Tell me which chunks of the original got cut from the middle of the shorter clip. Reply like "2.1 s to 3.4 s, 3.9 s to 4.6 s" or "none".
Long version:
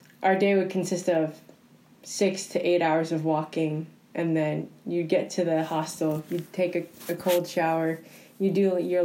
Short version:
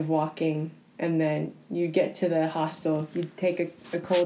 none